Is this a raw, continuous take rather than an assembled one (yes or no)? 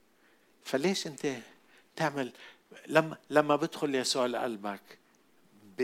yes